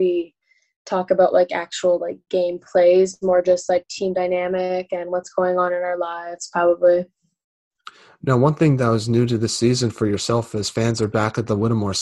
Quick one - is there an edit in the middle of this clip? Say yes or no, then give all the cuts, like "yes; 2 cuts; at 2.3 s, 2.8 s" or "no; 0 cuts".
no; 0 cuts